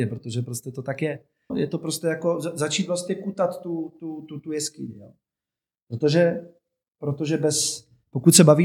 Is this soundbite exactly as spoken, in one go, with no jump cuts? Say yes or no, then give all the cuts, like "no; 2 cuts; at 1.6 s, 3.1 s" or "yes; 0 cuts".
no; 1 cut; at 1.5 s